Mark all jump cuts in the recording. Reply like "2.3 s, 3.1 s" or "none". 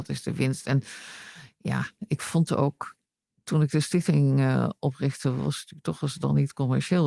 none